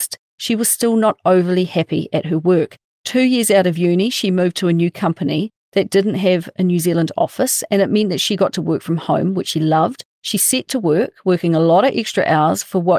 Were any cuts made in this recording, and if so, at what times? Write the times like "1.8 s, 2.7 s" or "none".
10.1 s